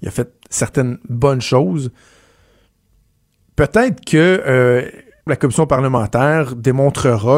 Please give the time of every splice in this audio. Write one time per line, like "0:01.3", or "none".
0:05.3